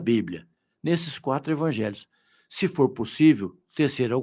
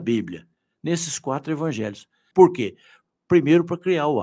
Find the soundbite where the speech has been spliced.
second; 1 cut; at 2.3 s

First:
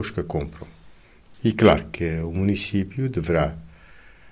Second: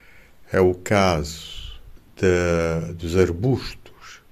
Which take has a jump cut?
first; 1 cut; at 1.3 s

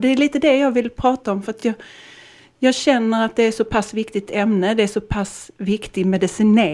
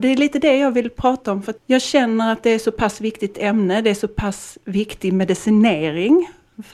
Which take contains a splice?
second; 1 cut; at 1.6 s

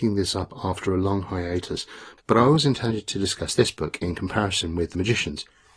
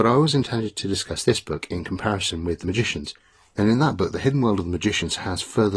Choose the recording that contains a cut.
first; 1 cut; at 2.2 s

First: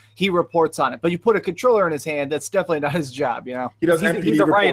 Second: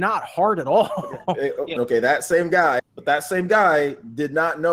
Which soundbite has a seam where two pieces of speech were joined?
second; 2 cuts; at 1.8 s, 2.8 s

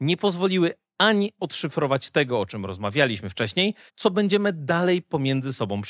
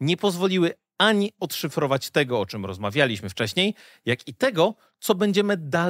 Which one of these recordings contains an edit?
first; 1 cut; at 3.9 s

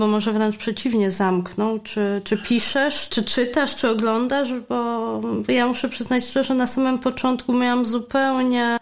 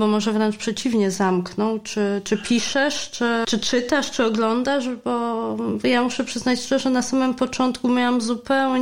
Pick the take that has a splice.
first; 1 cut; at 3.1 s

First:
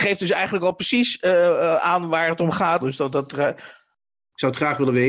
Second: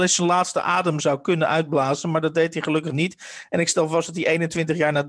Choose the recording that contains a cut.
first; 1 cut; at 2.8 s

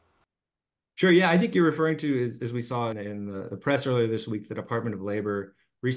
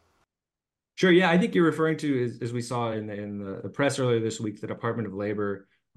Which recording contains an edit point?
first; 1 cut; at 2.9 s

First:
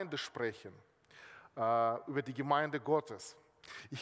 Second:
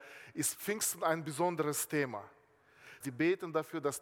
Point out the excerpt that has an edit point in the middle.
second; 1 cut; at 3.0 s

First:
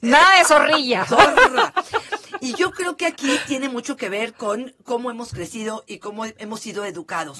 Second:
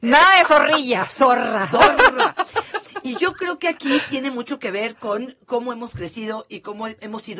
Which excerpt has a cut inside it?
first; 1 cut; at 1.1 s

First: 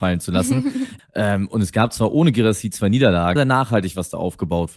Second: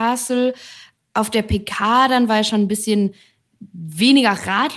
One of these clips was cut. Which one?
first; 2 cuts; at 1.0 s, 3.4 s

